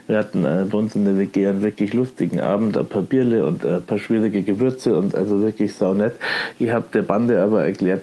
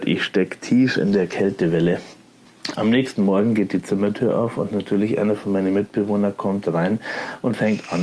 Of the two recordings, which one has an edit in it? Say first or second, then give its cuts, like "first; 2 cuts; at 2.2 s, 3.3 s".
second; 1 cut; at 2.8 s